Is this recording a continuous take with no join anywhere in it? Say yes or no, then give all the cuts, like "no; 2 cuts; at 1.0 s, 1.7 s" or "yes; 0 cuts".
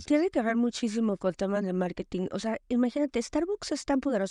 yes; 0 cuts